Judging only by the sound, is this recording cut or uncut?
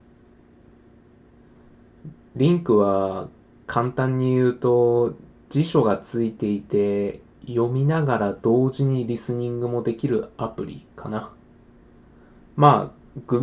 uncut